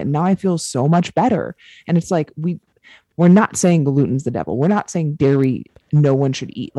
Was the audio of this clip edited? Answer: no; 0 cuts

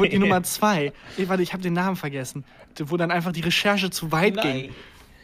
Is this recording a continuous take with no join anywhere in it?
no; 1 cut; at 2.7 s

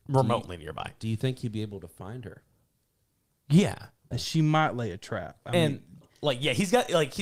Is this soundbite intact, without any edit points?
no; 2 cuts; at 4.1 s, 6.0 s

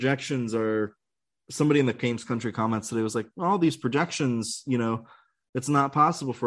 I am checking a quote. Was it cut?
no; 0 cuts

